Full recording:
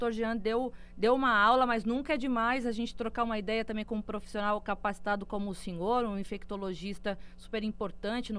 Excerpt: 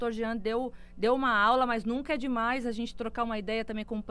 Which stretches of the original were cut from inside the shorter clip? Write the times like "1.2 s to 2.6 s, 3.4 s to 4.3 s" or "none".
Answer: none

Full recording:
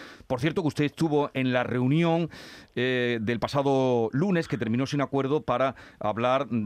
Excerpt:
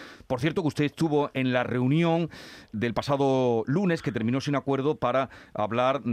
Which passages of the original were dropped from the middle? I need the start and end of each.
2.7 s to 3.2 s

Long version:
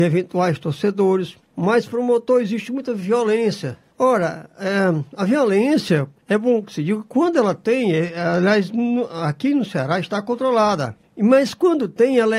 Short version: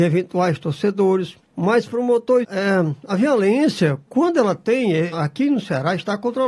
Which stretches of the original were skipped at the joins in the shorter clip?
2.4 s to 4.5 s, 6.2 s to 7.1 s, 8.1 s to 9.2 s

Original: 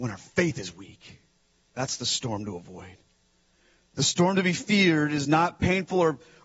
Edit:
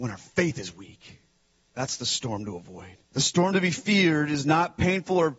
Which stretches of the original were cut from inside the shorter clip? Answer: 3.0 s to 3.9 s

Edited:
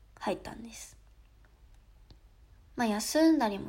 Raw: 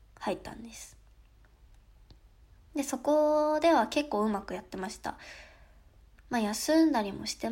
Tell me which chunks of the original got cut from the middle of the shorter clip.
2.7 s to 6.2 s

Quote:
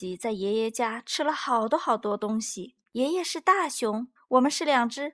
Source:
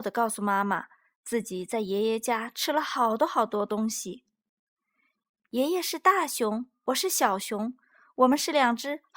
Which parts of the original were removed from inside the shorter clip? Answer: 4.3 s to 5.4 s, 6.7 s to 8.0 s

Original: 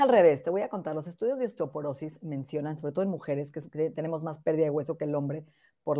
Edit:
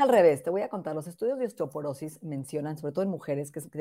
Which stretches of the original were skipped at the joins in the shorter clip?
none

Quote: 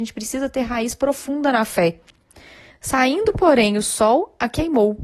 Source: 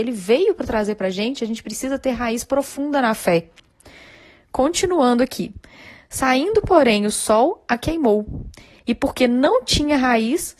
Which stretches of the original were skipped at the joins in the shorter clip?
4.2 s to 6.0 s

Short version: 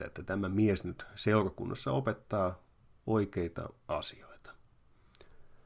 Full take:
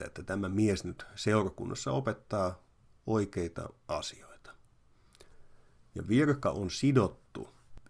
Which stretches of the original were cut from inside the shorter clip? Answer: none

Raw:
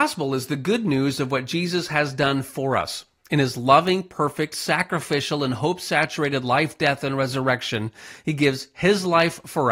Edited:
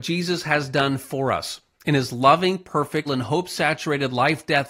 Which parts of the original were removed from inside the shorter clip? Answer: 4.5 s to 5.4 s

